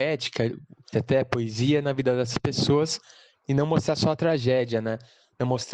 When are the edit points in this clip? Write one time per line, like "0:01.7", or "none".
0:00.9